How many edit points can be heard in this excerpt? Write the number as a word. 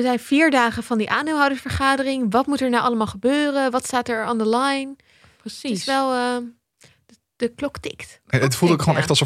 zero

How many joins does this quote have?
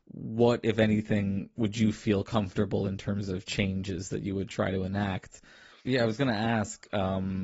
one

